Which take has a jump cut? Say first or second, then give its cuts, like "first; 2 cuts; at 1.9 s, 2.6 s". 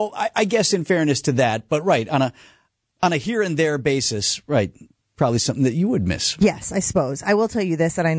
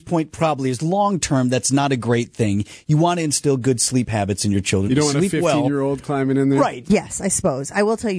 second; 2 cuts; at 4.9 s, 6.8 s